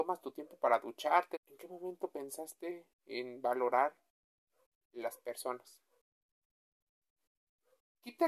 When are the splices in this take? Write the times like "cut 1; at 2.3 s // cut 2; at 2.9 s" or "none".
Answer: cut 1; at 1.3 s